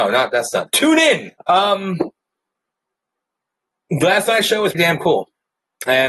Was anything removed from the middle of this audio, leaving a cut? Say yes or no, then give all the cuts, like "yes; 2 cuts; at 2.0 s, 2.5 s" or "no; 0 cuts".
yes; 2 cuts; at 1.4 s, 4.7 s